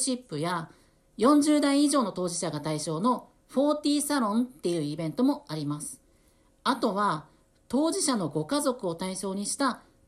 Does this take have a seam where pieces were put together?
no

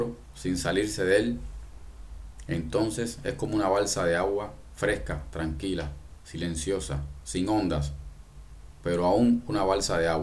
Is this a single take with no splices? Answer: yes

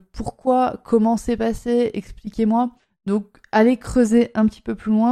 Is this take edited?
no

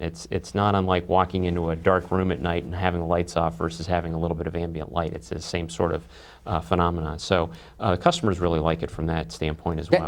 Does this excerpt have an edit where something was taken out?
no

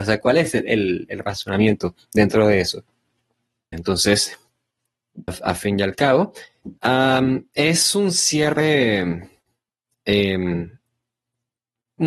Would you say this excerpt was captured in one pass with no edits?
no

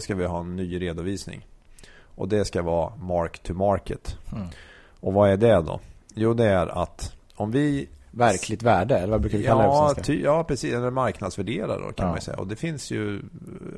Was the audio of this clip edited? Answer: no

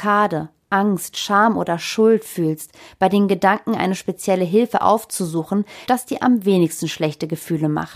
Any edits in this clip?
yes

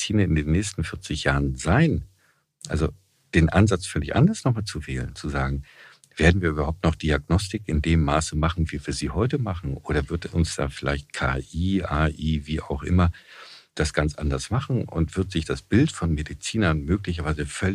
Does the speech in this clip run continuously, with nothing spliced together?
yes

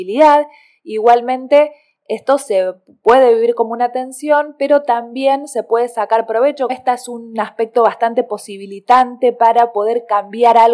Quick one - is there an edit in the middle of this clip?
yes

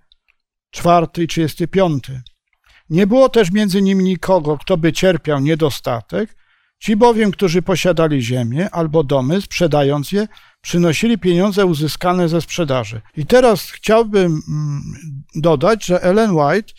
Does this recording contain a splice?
yes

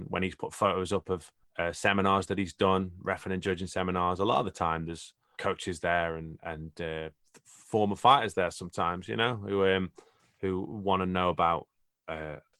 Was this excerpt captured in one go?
no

